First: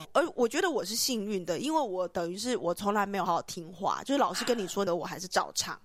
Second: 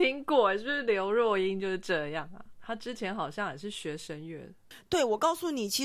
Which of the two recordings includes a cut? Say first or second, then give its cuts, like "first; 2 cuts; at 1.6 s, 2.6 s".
first; 2 cuts; at 3.3 s, 4.9 s